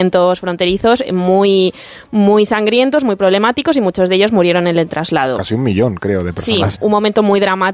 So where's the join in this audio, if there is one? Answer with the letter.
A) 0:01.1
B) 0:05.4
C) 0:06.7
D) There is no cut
C